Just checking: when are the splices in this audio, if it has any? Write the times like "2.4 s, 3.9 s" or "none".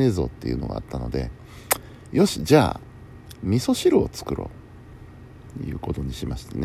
none